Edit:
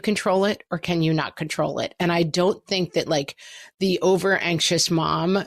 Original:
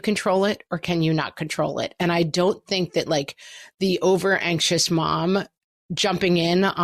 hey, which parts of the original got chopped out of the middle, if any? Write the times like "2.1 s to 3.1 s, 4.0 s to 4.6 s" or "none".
none